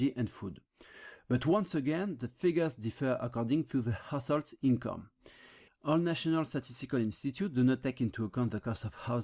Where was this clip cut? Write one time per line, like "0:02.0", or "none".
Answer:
0:05.7

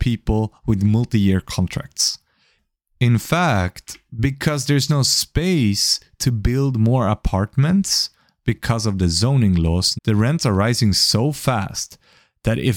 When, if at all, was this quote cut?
0:04.9
0:09.9

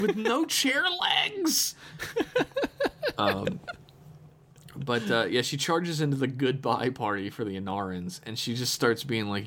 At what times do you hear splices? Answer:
none

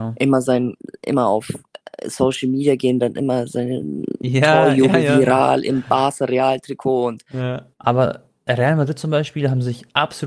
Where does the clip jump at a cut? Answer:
0:07.7

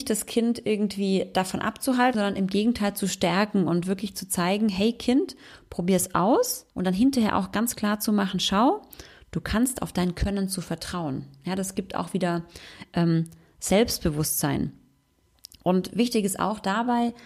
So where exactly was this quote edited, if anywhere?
0:02.1
0:06.7

